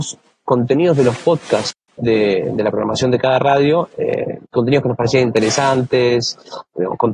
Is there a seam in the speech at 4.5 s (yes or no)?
yes